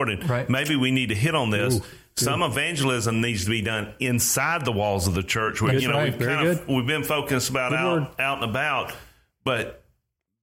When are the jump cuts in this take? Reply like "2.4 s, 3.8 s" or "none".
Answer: none